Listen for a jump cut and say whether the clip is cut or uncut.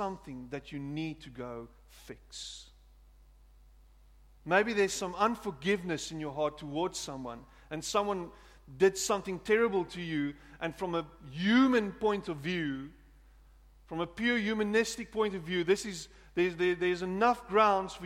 uncut